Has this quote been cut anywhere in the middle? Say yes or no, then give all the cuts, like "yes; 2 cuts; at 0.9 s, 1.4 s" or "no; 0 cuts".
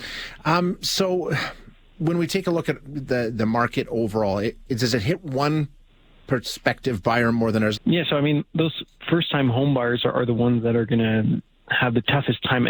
yes; 1 cut; at 7.8 s